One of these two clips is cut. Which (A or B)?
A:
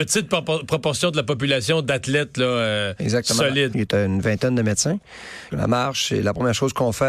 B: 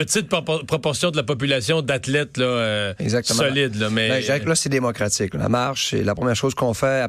A